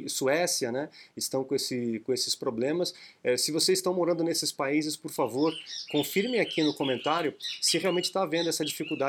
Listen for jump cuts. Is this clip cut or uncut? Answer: uncut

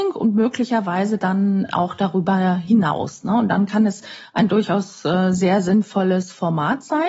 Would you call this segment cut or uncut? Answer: uncut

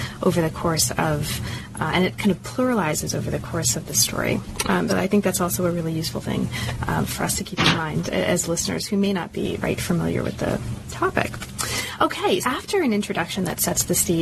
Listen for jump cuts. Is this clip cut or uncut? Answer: cut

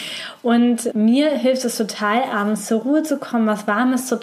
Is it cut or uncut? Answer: cut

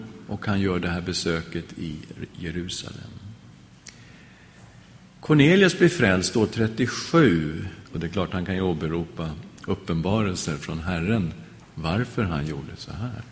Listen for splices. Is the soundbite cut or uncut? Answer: cut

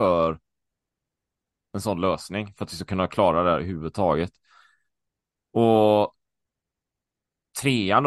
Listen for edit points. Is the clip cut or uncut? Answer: uncut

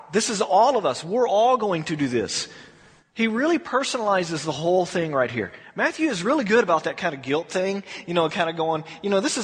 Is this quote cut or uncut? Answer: uncut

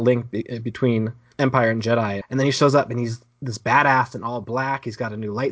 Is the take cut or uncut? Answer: cut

